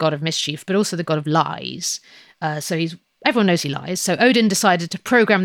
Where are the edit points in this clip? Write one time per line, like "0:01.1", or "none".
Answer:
none